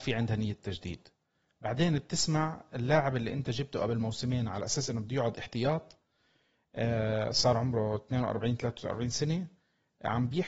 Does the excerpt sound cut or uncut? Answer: uncut